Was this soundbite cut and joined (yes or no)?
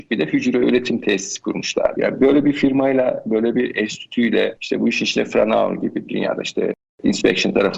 yes